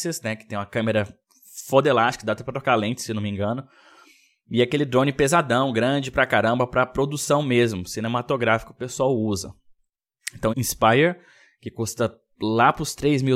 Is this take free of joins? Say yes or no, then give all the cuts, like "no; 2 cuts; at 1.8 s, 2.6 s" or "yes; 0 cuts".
no; 1 cut; at 10.5 s